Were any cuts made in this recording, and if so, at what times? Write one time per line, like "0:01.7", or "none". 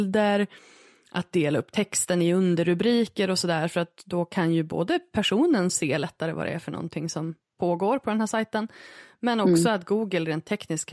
none